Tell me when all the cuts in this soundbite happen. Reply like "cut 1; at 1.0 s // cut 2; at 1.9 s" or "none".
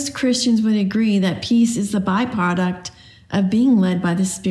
none